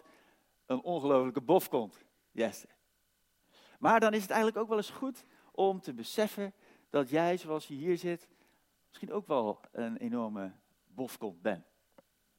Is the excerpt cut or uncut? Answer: uncut